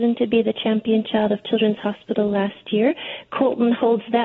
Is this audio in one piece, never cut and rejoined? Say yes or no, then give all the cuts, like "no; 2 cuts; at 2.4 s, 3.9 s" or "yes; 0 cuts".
yes; 0 cuts